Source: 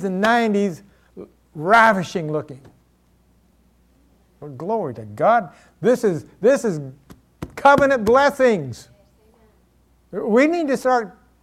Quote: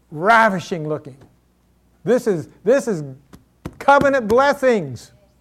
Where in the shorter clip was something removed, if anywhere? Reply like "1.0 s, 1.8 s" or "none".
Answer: 1.9 s